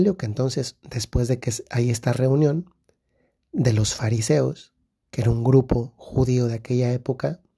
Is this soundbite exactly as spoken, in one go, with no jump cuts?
yes; 0 cuts

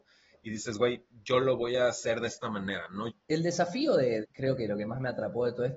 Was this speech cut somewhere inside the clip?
yes; 2 cuts; at 3.1 s, 4.2 s

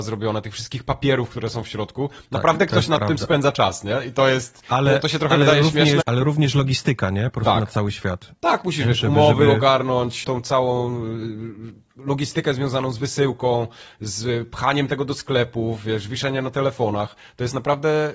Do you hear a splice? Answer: yes; 2 cuts; at 6.0 s, 10.2 s

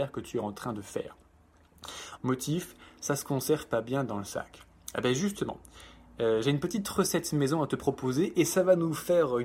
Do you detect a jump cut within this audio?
yes; 1 cut; at 2.2 s

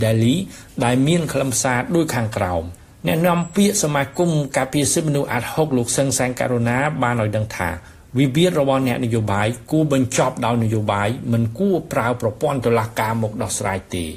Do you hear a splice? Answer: no; 0 cuts

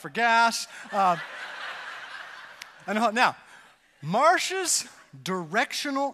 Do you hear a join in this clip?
no; 0 cuts

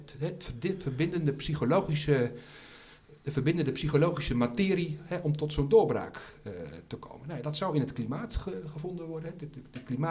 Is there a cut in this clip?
no; 0 cuts

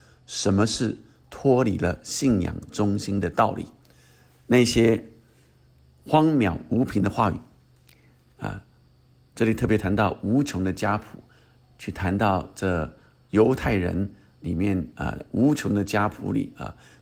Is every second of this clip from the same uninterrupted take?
yes; 0 cuts

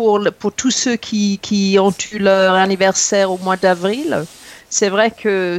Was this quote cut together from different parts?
no; 0 cuts

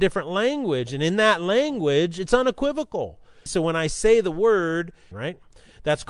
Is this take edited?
yes; 2 cuts; at 3.5 s, 5.1 s

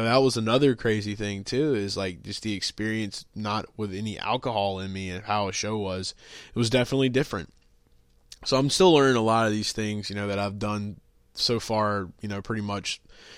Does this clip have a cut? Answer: no; 0 cuts

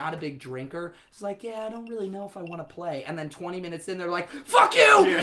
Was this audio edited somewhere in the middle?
no; 0 cuts

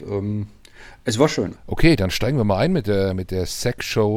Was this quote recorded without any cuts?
no; 1 cut; at 1.6 s

